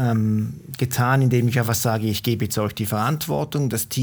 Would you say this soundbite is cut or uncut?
uncut